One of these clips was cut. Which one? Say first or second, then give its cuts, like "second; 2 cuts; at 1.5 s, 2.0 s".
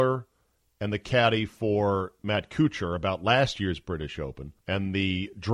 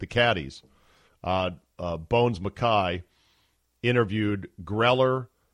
first; 1 cut; at 4.6 s